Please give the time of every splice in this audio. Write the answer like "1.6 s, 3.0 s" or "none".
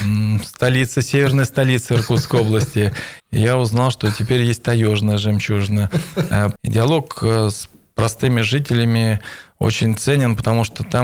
3.2 s, 6.6 s